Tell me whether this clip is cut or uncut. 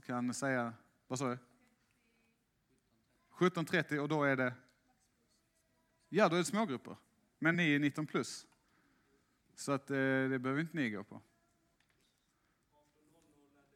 cut